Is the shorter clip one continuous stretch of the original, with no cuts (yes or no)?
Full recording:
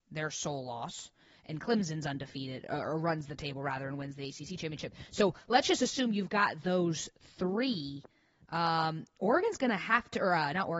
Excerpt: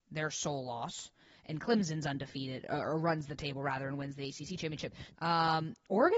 no